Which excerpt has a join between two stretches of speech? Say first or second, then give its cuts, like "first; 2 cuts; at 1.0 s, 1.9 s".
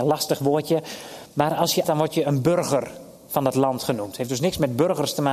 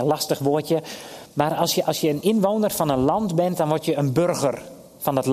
first; 1 cut; at 1.8 s